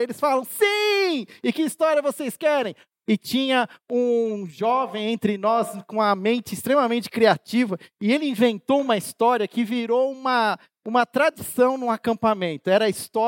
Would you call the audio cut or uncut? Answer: cut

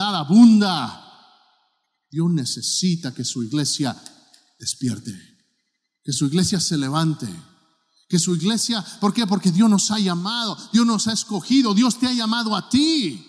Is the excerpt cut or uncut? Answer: uncut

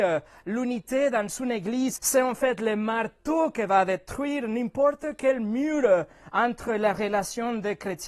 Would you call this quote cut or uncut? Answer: cut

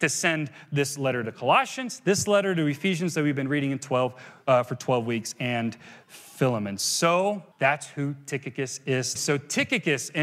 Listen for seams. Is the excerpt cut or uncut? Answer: cut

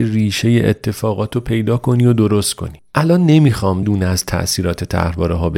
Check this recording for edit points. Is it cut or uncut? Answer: cut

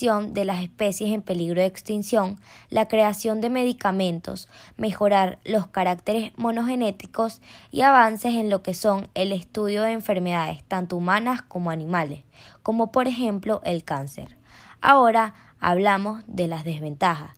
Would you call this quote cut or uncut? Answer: uncut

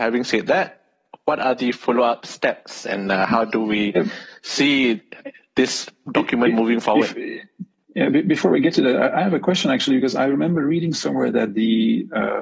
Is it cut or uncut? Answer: uncut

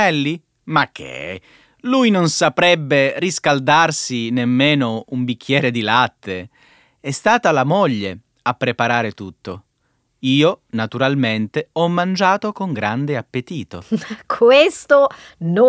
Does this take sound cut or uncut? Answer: uncut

